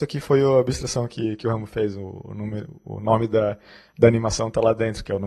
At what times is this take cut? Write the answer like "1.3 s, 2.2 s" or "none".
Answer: none